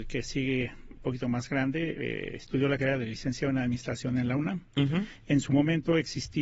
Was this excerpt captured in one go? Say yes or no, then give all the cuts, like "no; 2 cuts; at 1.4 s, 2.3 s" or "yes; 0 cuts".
yes; 0 cuts